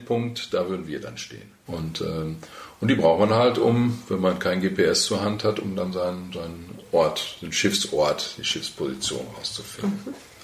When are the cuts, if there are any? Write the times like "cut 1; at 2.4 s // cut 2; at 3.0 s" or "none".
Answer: cut 1; at 1.7 s